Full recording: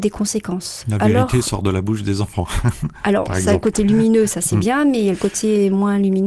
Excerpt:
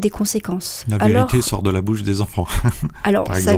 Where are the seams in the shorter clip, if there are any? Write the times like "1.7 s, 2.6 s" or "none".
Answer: none